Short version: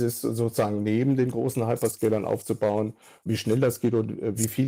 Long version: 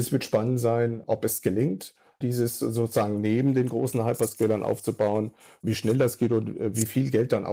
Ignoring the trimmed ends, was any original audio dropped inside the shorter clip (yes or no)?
no